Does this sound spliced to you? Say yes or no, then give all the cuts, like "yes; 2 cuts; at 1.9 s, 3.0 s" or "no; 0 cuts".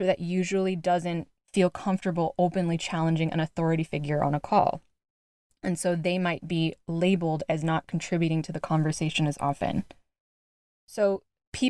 no; 0 cuts